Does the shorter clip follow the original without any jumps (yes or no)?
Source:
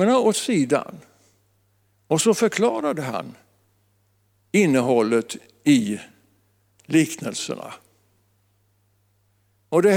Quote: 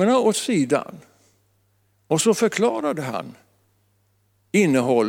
yes